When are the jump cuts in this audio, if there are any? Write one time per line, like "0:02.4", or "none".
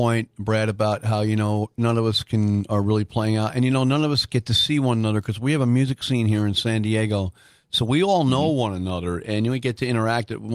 none